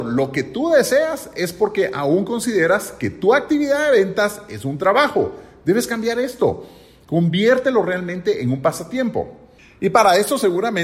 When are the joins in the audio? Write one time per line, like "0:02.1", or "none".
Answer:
none